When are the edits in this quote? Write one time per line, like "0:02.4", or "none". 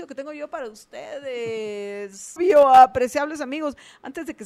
0:02.4